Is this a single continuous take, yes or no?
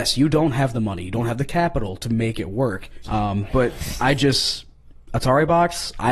no